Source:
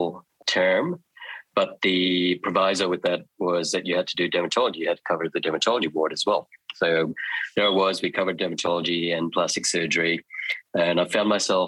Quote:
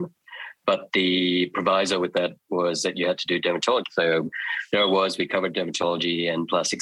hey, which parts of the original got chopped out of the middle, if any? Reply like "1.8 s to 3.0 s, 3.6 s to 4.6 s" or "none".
4.7 s to 6.7 s